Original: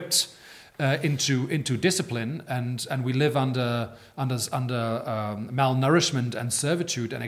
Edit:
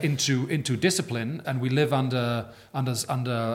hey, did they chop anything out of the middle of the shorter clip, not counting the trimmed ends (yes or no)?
yes